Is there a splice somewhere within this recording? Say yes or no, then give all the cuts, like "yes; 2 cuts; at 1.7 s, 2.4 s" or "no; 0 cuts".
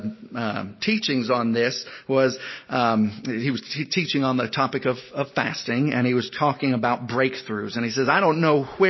no; 0 cuts